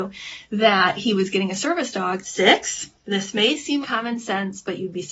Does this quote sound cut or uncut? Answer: cut